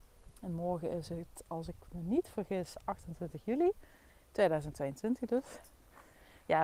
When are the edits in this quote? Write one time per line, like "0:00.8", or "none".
none